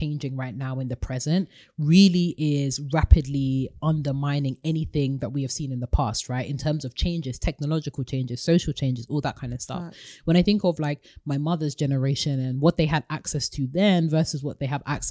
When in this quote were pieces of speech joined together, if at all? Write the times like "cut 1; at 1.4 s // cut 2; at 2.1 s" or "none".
none

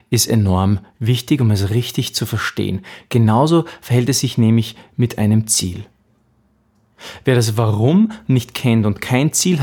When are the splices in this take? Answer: none

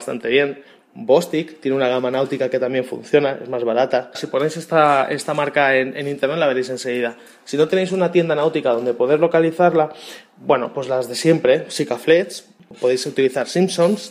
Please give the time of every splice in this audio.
cut 1; at 4.1 s

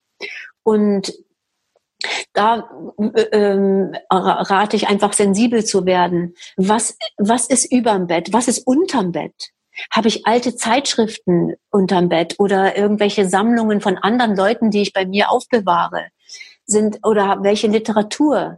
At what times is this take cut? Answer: none

